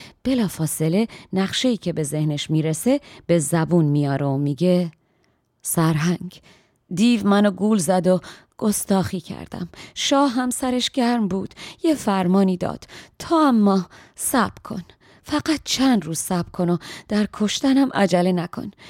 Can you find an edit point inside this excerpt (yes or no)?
no